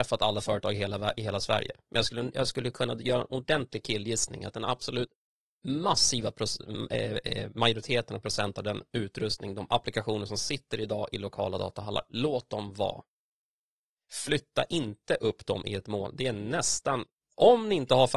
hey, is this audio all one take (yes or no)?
yes